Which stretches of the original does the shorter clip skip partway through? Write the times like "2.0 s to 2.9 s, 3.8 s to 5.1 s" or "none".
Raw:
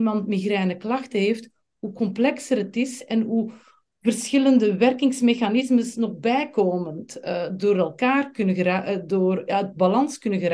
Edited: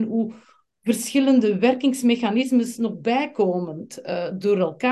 none